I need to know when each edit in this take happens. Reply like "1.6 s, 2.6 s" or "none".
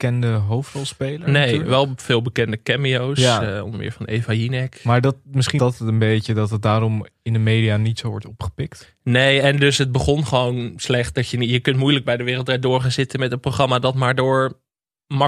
5.6 s